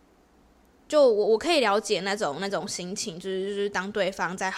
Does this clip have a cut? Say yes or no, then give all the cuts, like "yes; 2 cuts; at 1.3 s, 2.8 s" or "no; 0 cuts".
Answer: no; 0 cuts